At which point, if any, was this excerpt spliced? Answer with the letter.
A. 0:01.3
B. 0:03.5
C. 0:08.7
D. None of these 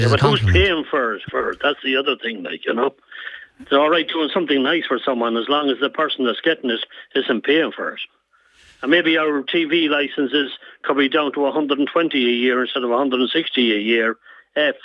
A